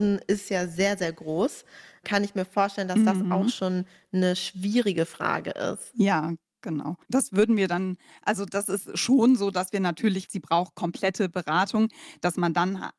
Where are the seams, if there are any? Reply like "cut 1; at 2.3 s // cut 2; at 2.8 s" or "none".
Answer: cut 1; at 7.0 s // cut 2; at 10.3 s